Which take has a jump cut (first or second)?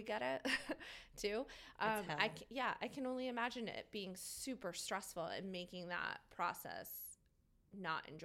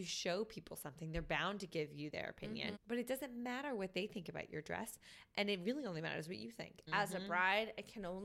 second